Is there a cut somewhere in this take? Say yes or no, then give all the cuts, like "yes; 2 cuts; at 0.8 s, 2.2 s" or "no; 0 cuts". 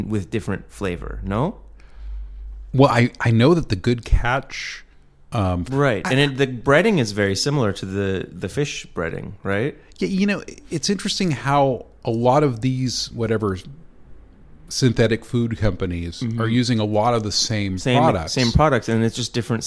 yes; 1 cut; at 5.7 s